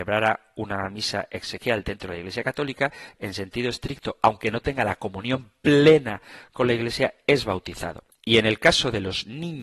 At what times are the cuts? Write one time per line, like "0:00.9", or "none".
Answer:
0:08.1